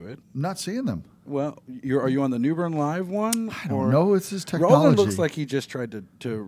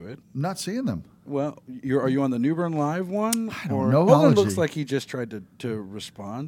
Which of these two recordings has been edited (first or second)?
second